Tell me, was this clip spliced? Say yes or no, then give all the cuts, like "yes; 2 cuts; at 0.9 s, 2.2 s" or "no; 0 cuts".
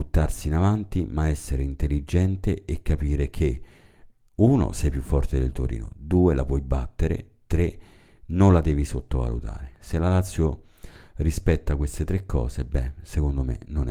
no; 0 cuts